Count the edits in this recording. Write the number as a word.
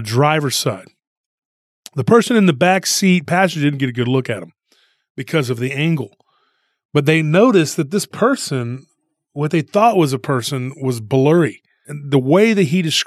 one